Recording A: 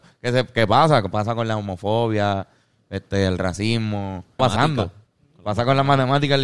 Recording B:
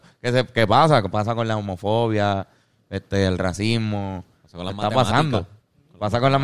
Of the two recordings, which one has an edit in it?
A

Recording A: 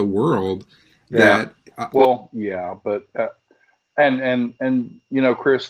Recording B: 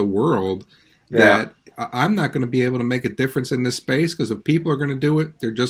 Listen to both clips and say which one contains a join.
A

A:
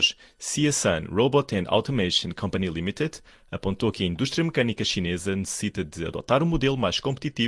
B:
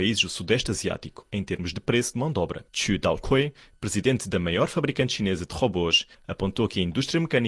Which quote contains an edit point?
B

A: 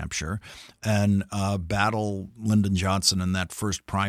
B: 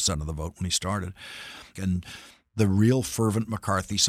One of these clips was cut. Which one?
B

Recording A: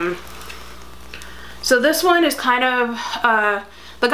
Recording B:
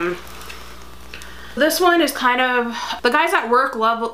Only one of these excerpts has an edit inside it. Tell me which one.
B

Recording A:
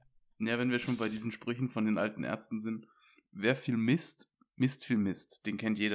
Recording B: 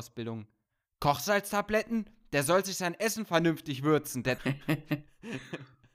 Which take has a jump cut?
B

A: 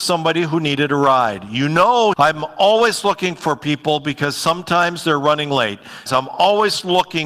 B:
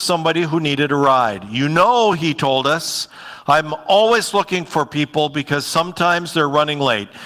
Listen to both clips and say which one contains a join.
A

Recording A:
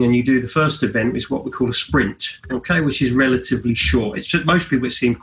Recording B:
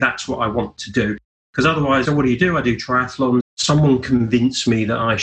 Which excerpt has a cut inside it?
B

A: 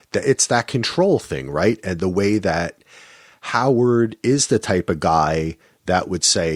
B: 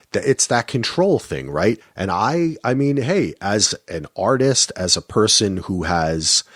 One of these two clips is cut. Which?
B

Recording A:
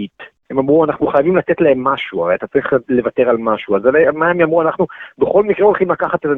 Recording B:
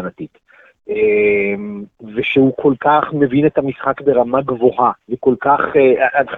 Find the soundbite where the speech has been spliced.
B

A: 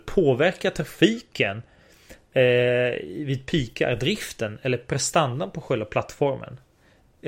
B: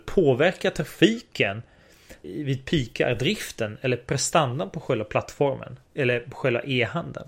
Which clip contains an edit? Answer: B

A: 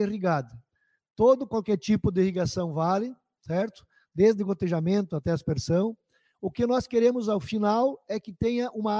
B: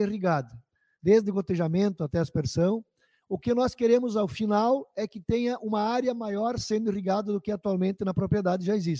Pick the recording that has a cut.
B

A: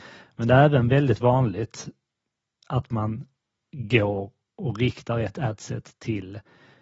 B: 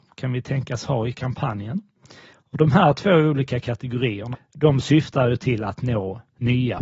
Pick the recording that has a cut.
B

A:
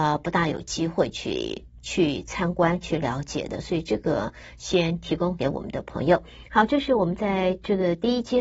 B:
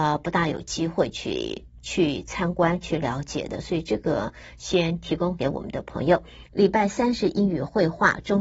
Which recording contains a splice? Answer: B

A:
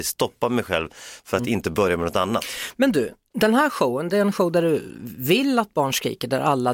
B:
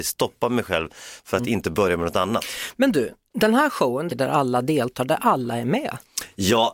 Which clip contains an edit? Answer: B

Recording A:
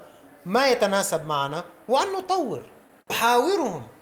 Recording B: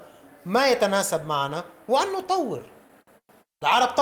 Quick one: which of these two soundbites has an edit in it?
A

